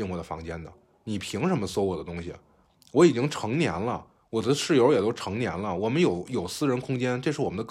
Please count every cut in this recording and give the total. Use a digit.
0